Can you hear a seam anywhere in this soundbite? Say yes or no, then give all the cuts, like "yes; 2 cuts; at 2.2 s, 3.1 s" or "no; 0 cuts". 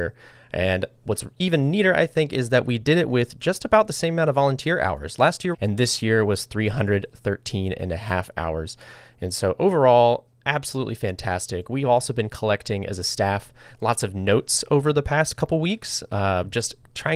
yes; 2 cuts; at 1.0 s, 5.5 s